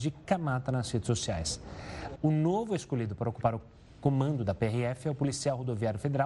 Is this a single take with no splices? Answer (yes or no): no